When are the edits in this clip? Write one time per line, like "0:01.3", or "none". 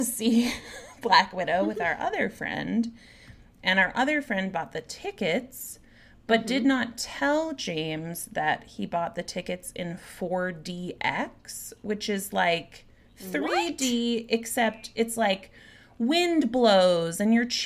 none

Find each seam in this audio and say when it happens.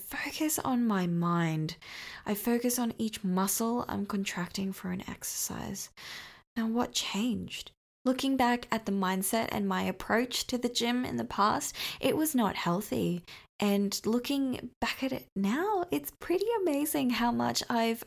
none

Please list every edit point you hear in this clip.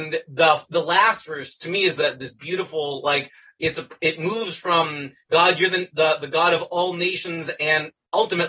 none

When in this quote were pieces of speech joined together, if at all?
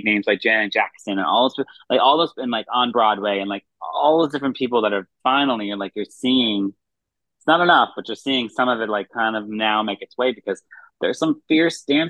none

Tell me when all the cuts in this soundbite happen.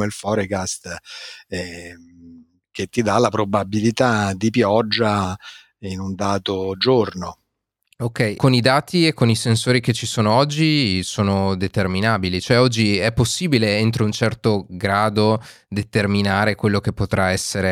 0:08.4

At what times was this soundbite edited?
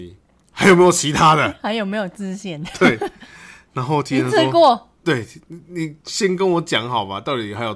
none

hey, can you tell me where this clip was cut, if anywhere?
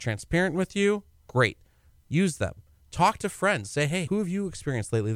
0:04.1

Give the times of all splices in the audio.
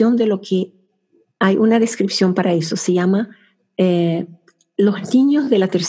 none

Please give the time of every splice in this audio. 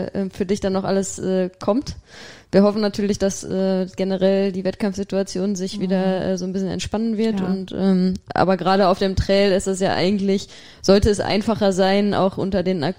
none

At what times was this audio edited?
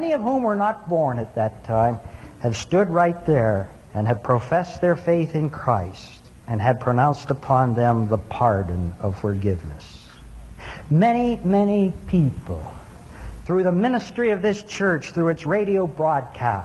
0:03.9

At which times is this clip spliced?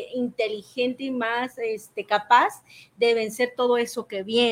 none

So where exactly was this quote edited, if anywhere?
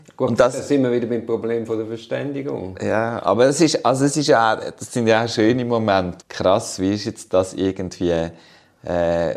0:06.2

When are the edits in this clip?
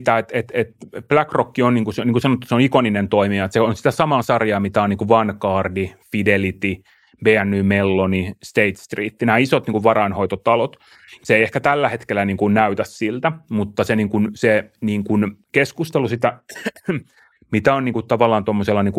0:11.2

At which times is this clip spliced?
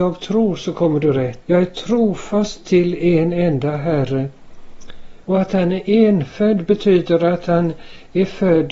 0:01.4
0:05.2

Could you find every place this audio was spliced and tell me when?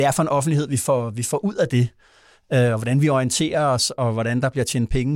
none

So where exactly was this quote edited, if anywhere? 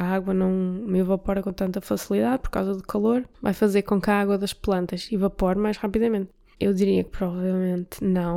0:03.3
0:06.5

